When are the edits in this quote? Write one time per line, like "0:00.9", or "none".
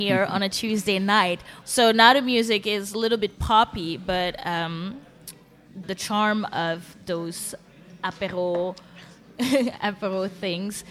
0:01.6
0:05.8